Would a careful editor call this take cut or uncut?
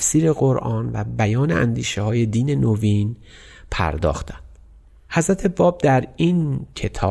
uncut